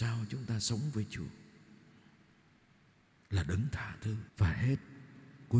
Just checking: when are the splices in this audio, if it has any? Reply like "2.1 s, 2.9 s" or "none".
4.3 s